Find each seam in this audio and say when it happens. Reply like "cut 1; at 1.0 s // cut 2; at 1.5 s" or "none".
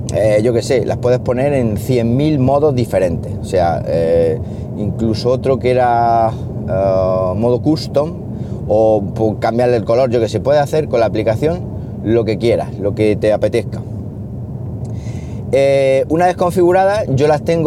none